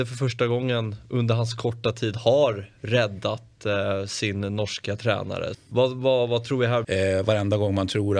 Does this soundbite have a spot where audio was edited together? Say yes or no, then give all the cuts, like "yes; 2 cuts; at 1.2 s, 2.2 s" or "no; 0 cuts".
yes; 2 cuts; at 5.5 s, 6.8 s